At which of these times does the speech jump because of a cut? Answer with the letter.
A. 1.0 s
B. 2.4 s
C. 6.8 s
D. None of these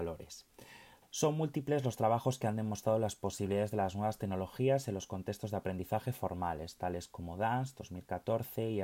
A